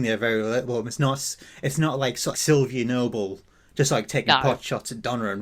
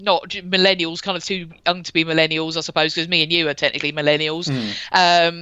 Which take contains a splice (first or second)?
first